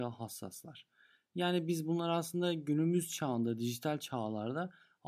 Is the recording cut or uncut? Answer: uncut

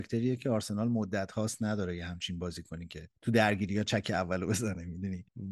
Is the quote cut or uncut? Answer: cut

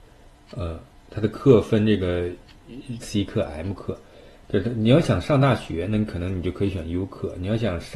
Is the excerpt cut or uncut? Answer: cut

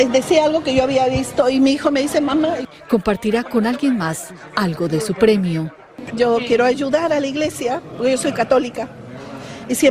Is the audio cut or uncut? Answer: cut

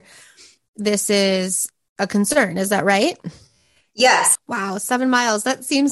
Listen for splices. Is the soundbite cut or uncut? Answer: cut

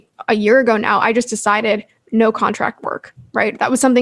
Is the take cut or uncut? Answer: uncut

